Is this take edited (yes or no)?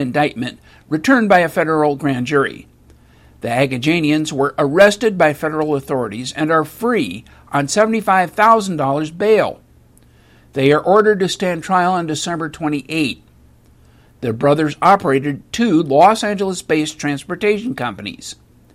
no